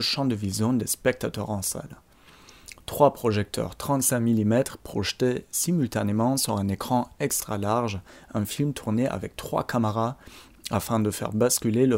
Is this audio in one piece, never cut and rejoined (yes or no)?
yes